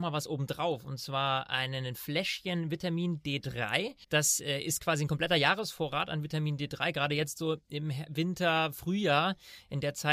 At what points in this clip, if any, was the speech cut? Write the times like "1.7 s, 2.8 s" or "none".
4.0 s